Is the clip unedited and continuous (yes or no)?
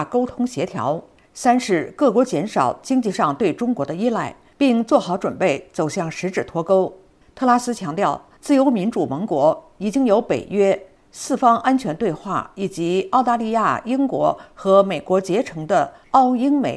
yes